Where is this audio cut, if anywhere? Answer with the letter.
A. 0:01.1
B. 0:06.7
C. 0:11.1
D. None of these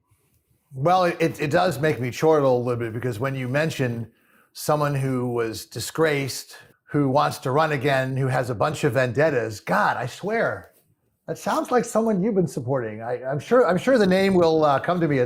B